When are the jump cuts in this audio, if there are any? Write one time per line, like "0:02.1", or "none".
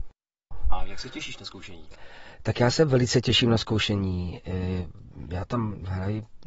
none